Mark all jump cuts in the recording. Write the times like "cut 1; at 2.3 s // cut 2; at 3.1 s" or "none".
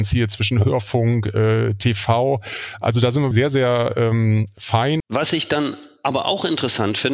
cut 1; at 3.3 s // cut 2; at 5.0 s